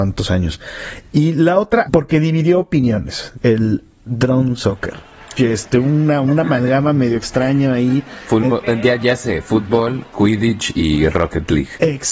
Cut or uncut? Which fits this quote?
cut